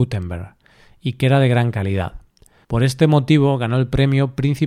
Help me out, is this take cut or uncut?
cut